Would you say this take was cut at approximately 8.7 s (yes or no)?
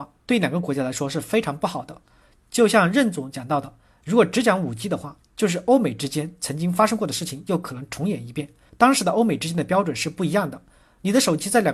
yes